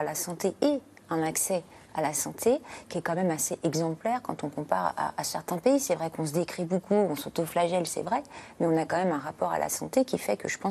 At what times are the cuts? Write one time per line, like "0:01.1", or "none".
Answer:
none